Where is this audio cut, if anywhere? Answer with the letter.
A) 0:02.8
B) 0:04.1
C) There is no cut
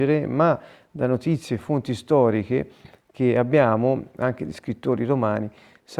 C